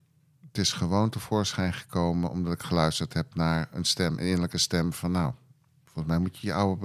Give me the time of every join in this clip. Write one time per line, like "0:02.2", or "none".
none